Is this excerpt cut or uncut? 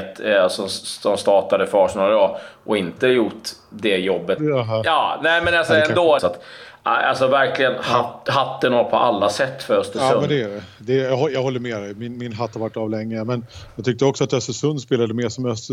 cut